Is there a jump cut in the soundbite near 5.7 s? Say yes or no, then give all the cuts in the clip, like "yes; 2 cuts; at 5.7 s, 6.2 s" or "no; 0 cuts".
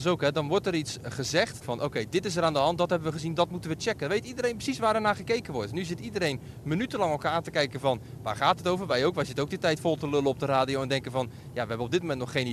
no; 1 cut; at 1.6 s